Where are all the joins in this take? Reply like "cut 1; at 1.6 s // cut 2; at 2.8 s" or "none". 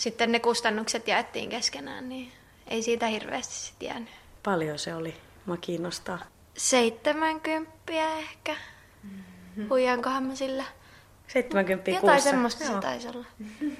none